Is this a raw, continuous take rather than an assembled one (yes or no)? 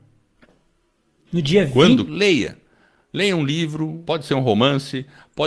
no